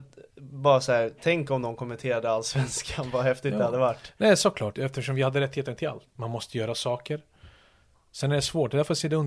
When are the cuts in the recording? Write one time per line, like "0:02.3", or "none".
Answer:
0:04.7
0:06.1